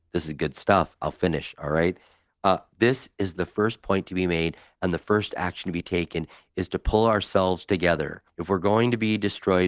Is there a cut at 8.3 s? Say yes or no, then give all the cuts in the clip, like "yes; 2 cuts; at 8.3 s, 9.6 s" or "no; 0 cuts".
yes; 1 cut; at 8.3 s